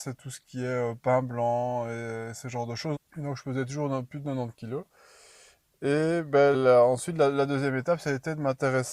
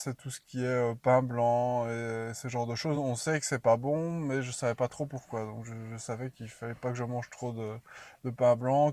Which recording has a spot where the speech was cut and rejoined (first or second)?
first